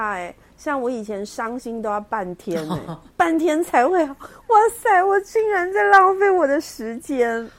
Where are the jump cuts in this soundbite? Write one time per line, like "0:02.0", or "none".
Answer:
none